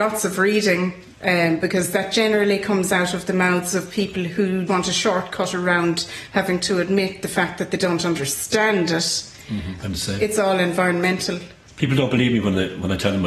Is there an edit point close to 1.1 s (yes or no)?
yes